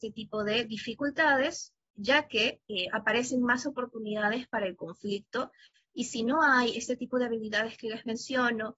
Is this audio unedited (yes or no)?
yes